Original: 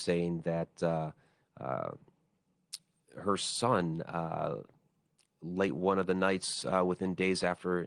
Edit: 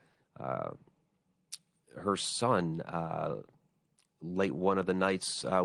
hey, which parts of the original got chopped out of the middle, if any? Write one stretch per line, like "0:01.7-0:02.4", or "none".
none